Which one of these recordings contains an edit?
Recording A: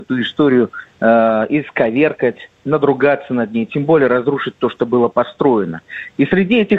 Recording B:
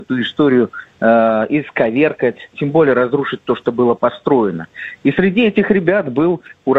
B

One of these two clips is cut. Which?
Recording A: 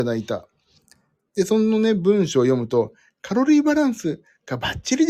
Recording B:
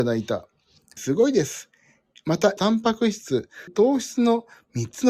B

